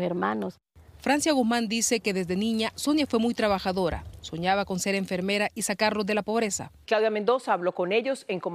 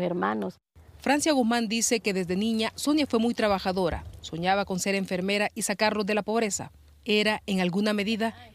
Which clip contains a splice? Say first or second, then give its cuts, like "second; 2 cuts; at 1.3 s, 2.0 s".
first; 1 cut; at 6.8 s